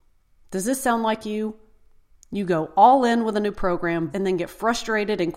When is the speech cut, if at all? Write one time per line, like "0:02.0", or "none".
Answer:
0:04.1

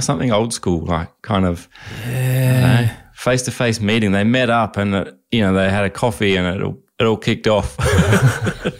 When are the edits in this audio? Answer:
none

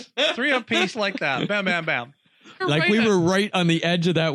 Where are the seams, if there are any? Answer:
0:00.9
0:02.6

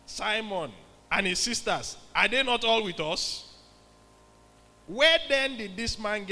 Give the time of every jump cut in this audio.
0:01.0

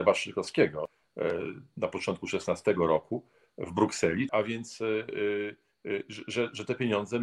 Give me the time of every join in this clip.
0:04.3

